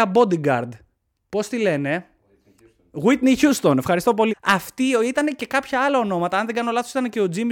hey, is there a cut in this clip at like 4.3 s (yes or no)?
yes